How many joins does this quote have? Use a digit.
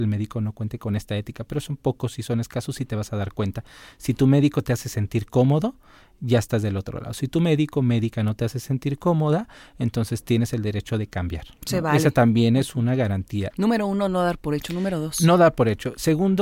1